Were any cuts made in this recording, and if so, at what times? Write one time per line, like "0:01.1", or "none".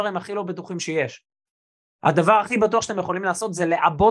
none